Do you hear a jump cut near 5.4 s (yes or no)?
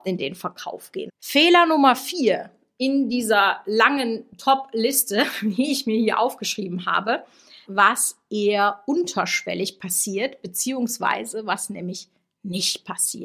no